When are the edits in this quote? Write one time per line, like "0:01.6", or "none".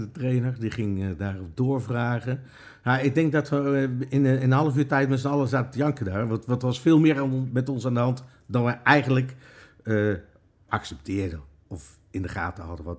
none